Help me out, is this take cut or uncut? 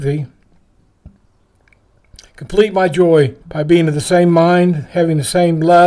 cut